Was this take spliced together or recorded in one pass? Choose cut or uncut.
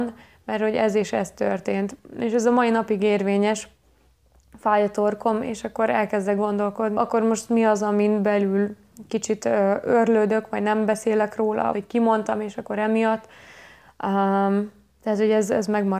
cut